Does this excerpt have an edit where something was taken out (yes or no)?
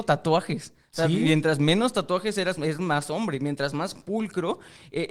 no